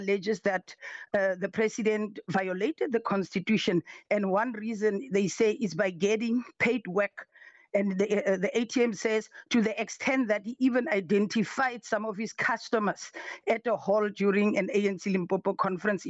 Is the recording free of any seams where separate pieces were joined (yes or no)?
yes